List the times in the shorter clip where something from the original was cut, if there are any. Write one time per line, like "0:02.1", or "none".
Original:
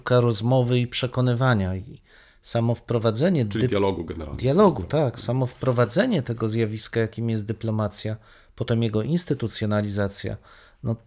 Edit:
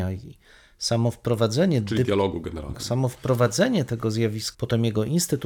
0:02.7
0:04.5